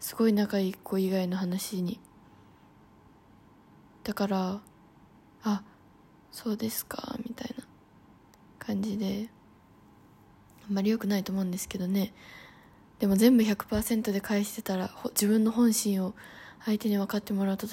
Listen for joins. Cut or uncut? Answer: uncut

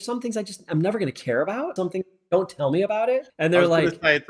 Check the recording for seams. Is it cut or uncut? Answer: cut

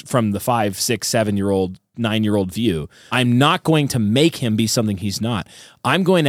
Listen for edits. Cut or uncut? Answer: cut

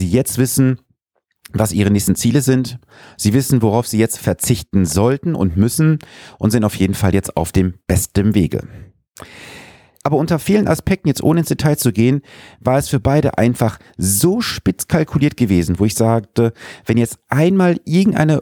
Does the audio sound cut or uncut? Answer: cut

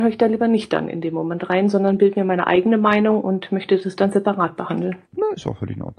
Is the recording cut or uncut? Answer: cut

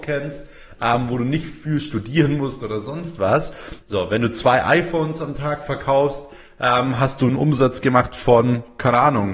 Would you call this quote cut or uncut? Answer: cut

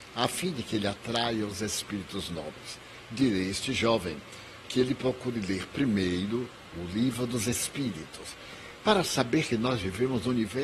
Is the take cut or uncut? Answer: uncut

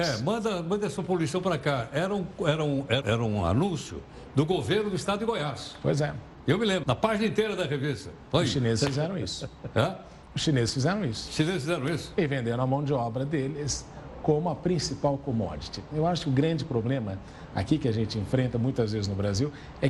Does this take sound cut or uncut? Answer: cut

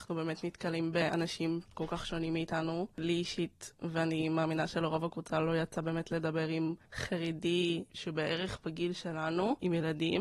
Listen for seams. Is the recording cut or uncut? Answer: cut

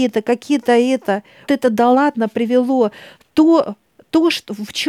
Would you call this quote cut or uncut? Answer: cut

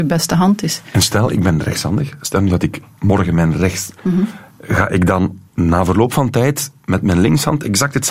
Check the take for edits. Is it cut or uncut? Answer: cut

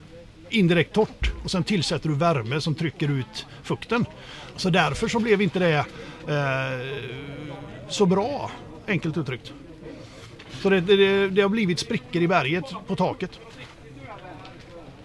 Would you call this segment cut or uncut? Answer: cut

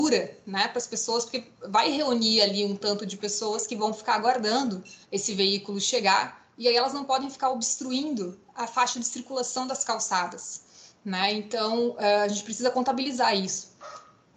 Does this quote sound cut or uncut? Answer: cut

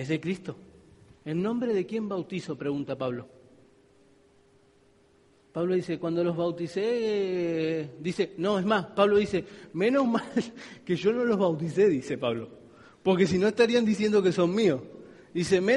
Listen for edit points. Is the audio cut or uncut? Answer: cut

